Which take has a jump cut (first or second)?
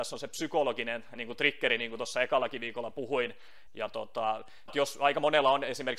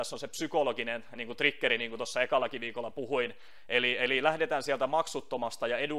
first